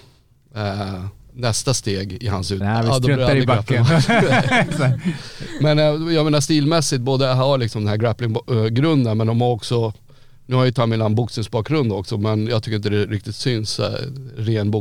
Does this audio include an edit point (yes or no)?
yes